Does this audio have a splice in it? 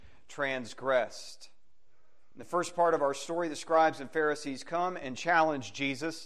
no; 0 cuts

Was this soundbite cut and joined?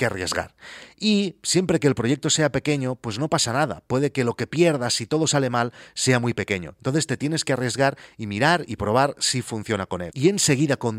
no; 0 cuts

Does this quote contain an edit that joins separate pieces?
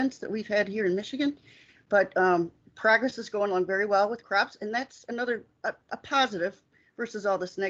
no; 0 cuts

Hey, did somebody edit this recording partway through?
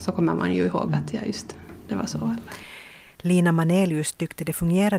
yes; 1 cut; at 3.1 s

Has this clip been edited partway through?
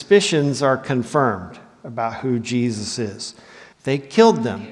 yes; 1 cut; at 3.7 s

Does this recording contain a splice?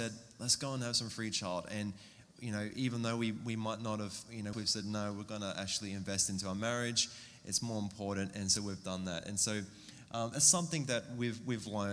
yes; 1 cut; at 4.5 s

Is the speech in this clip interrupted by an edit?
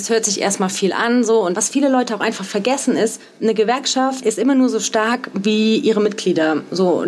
no; 0 cuts

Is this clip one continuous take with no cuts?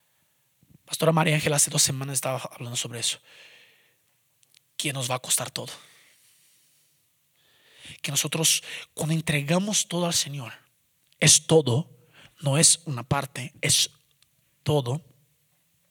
yes; 0 cuts

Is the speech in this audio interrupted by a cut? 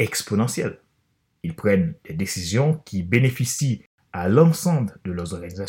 yes; 1 cut; at 1.4 s

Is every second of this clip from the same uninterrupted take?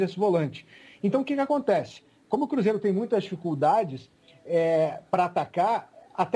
yes; 0 cuts

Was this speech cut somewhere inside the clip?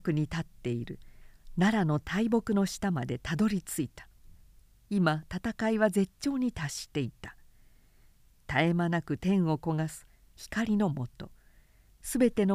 no; 0 cuts

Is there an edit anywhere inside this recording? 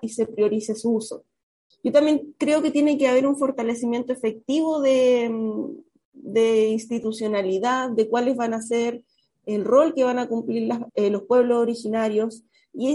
yes; 2 cuts; at 1.7 s, 10.9 s

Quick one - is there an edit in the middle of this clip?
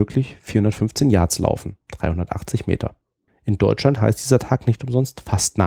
yes; 2 cuts; at 1.8 s, 3.3 s

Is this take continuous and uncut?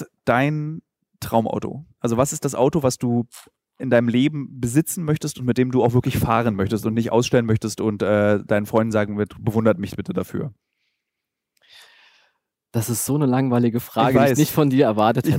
yes; 0 cuts

